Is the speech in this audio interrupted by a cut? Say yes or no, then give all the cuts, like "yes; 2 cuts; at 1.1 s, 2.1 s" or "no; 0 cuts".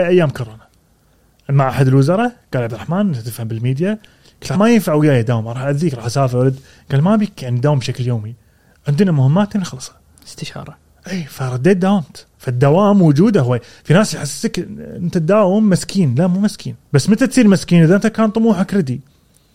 yes; 3 cuts; at 4.5 s, 12.3 s, 16.8 s